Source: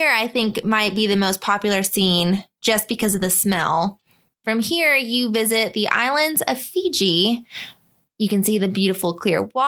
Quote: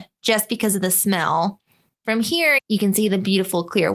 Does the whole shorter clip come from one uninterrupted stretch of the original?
no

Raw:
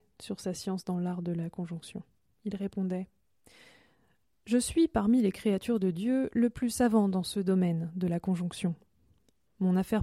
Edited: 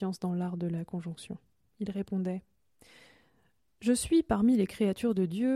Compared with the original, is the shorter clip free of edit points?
yes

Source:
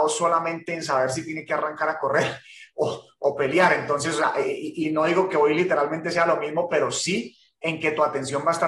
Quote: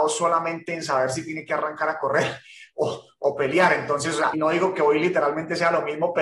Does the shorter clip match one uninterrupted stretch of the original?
no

